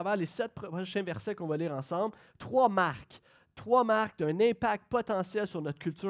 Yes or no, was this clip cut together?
no